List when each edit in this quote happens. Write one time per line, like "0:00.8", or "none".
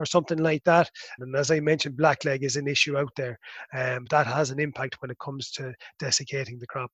0:01.2
0:04.1